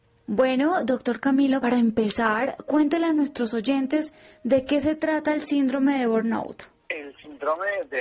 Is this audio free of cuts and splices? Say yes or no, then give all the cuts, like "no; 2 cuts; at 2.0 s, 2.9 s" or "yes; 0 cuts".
yes; 0 cuts